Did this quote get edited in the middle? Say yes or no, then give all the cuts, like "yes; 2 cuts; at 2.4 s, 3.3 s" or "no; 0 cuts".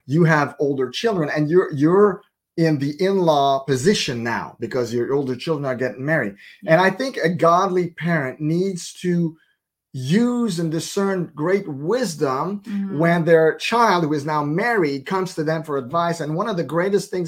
no; 0 cuts